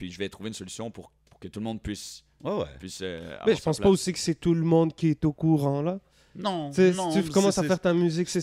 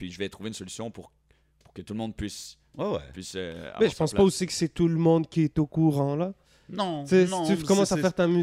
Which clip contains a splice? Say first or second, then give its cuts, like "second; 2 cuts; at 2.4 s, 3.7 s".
first; 1 cut; at 1.2 s